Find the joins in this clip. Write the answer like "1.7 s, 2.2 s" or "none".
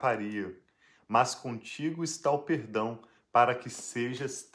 none